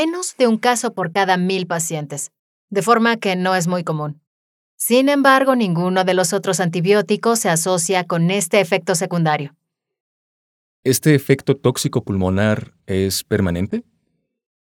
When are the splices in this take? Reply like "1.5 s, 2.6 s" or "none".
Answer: none